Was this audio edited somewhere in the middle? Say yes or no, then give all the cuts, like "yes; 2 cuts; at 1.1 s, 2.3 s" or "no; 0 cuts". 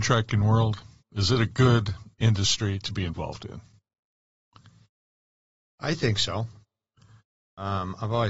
no; 0 cuts